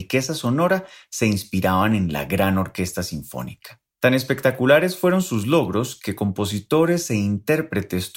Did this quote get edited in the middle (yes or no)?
yes